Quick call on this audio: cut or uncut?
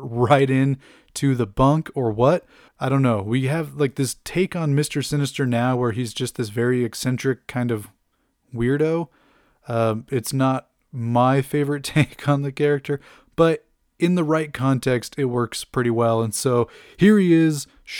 cut